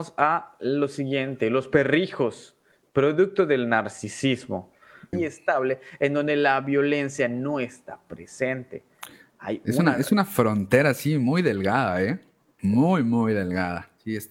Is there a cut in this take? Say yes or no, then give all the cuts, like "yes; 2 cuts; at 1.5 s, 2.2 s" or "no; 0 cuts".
yes; 2 cuts; at 5.1 s, 12.6 s